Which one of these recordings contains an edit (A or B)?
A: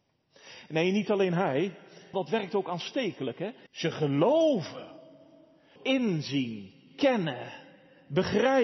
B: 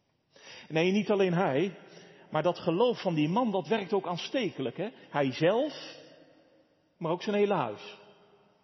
A